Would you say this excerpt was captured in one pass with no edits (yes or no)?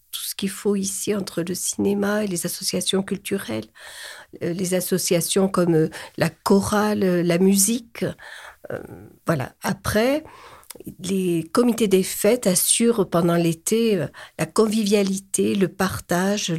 yes